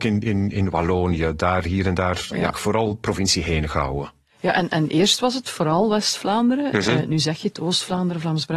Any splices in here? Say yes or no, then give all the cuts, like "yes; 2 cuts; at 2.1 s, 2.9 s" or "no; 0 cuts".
yes; 1 cut; at 2.5 s